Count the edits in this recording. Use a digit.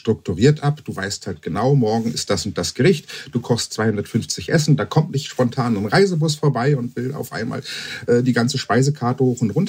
0